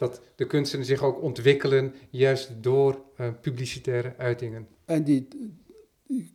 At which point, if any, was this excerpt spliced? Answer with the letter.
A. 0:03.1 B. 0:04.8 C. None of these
B